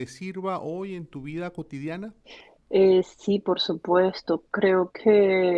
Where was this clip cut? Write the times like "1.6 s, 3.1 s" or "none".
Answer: none